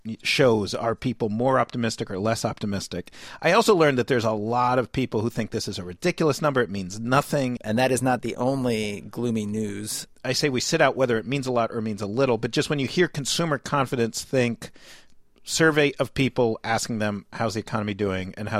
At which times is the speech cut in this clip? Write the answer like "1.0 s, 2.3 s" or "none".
7.6 s, 10.1 s